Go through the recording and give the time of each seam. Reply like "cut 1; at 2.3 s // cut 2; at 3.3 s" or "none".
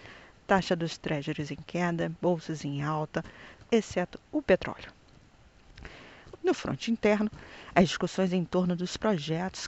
cut 1; at 3.7 s // cut 2; at 6.3 s